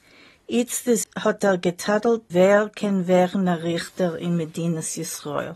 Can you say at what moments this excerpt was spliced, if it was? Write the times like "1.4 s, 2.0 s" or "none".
1.0 s, 2.3 s